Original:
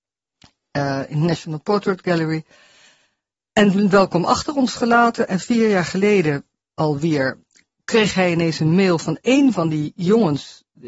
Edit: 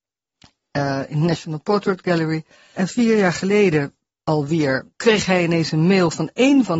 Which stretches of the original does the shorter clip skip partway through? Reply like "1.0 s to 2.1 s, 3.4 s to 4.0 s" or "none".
2.7 s to 5.3 s, 7.4 s to 7.8 s